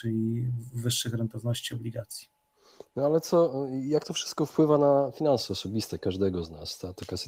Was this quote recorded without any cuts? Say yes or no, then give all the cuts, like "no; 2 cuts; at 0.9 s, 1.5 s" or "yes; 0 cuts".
yes; 0 cuts